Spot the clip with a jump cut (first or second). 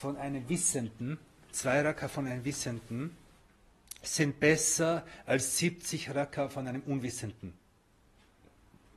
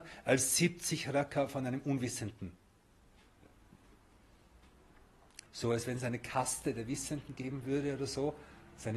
second